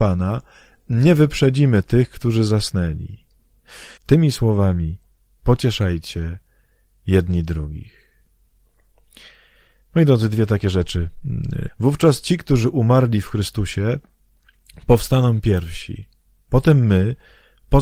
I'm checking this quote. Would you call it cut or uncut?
cut